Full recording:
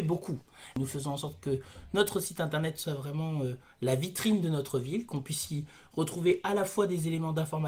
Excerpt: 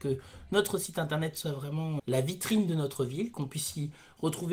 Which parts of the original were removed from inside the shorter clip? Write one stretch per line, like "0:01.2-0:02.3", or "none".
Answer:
0:03.4-0:03.7